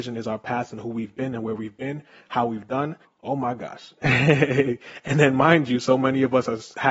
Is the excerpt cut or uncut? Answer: cut